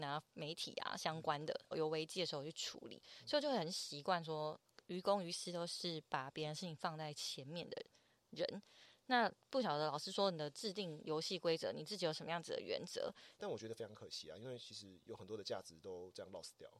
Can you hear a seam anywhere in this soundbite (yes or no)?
yes